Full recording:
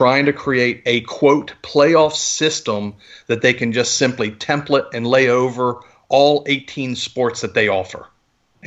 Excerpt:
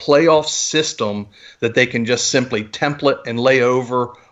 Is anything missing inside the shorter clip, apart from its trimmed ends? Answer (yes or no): no